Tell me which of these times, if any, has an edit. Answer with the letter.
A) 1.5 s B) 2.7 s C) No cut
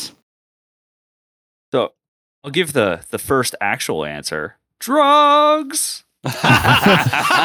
C